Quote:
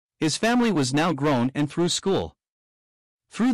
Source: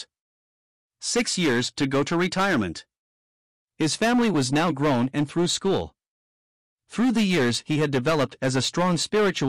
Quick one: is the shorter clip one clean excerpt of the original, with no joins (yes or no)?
yes